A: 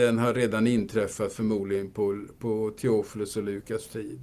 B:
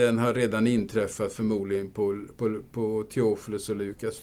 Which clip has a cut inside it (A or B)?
A